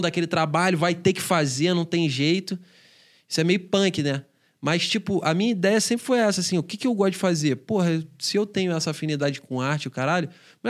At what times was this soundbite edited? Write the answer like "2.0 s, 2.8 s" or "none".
none